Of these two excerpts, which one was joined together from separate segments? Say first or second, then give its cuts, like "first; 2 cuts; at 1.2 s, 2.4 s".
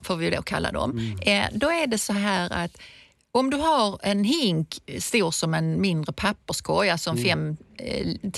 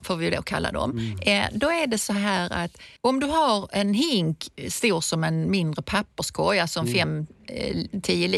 second; 1 cut; at 3.0 s